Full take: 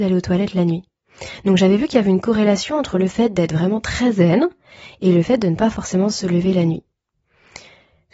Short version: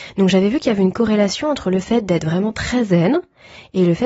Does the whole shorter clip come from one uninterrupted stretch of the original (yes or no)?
yes